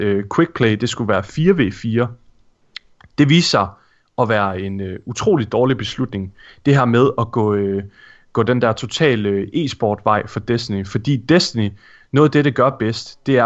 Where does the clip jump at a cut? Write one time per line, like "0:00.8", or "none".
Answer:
none